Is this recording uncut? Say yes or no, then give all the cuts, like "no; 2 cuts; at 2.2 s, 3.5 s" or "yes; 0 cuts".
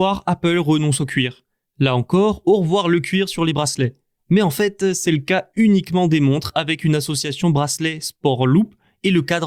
no; 2 cuts; at 1.7 s, 4.2 s